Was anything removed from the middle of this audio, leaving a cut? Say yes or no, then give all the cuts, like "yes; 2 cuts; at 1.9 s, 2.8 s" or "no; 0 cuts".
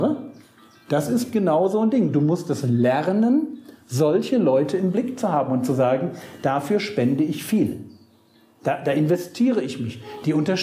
no; 0 cuts